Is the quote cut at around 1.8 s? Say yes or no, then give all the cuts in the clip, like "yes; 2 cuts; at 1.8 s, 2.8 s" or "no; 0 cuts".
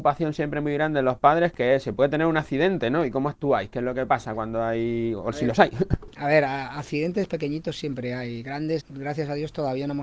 no; 2 cuts; at 7.3 s, 8.8 s